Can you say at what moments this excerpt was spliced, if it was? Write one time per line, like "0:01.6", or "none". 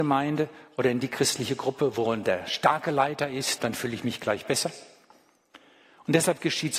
0:03.6